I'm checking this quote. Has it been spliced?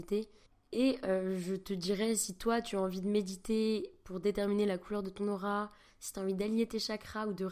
no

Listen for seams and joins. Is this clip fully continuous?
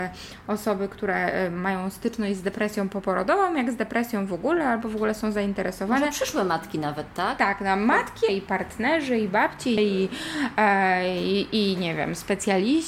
no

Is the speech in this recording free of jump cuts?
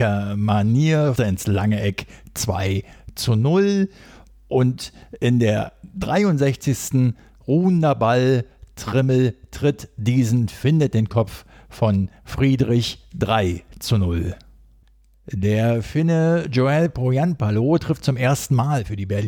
no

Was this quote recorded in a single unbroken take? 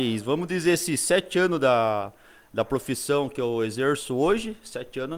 yes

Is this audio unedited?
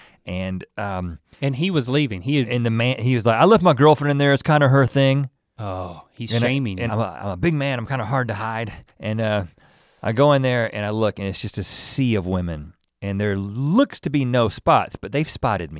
no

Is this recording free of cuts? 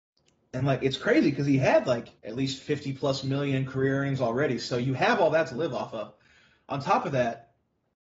no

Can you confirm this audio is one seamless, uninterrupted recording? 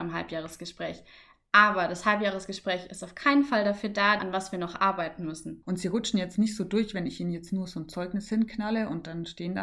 no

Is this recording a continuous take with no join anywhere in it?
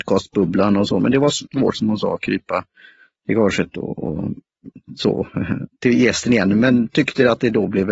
no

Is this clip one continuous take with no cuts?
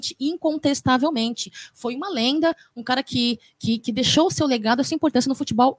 no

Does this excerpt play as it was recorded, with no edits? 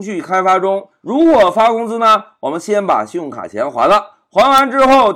no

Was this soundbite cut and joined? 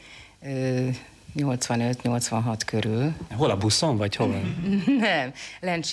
no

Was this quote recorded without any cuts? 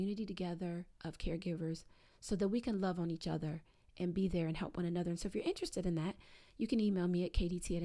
yes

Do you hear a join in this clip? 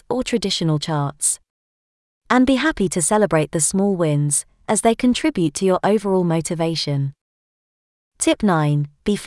no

